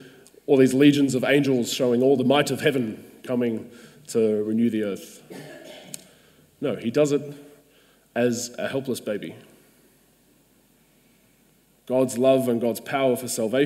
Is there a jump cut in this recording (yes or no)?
no